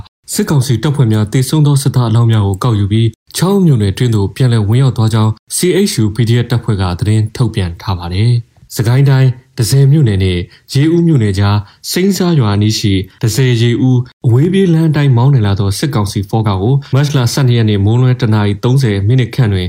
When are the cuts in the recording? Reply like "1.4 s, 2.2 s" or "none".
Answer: none